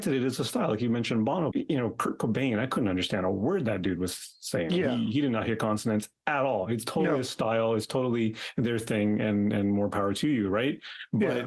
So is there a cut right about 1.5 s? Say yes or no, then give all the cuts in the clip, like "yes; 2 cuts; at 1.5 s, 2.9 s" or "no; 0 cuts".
yes; 1 cut; at 1.5 s